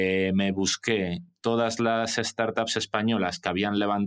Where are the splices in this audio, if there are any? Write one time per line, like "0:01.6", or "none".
none